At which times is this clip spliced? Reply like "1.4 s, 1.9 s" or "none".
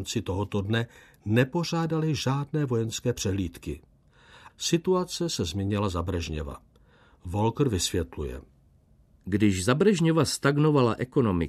4.5 s